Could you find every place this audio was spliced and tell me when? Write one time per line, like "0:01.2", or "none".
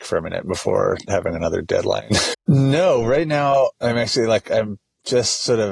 0:02.3
0:03.7